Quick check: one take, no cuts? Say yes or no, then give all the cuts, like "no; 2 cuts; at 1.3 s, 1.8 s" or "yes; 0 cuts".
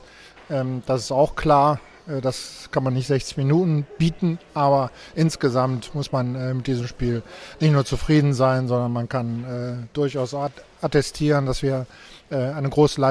yes; 0 cuts